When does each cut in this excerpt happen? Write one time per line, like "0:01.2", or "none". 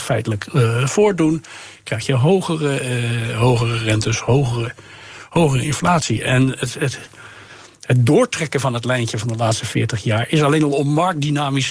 none